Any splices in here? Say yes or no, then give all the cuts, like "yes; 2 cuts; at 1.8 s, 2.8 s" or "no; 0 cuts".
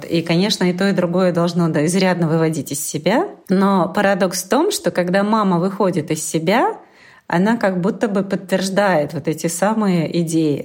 no; 0 cuts